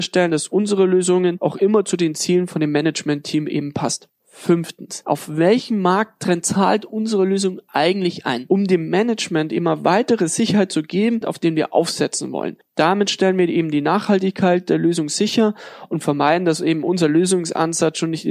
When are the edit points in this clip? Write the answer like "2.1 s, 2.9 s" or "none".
11.2 s